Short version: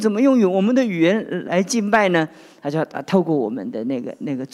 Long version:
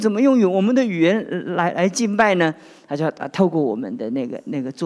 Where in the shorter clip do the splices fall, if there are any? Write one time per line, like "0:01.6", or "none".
0:01.5